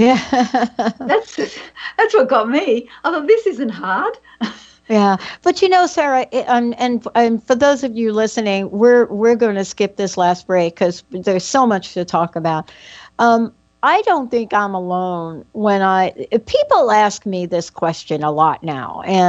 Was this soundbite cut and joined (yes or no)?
yes